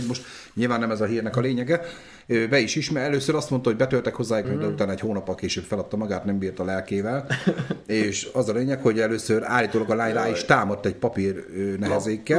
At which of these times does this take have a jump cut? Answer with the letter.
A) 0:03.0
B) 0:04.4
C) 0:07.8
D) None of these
B